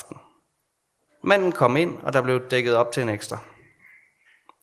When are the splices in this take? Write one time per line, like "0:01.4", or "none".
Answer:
0:01.0